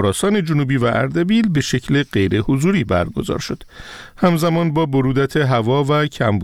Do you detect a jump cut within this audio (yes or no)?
no